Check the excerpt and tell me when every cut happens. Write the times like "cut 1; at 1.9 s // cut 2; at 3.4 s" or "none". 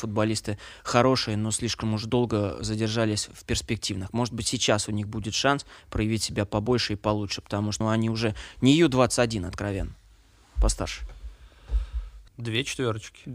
cut 1; at 7.8 s // cut 2; at 12.3 s